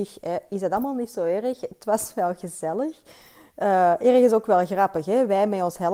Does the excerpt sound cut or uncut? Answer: uncut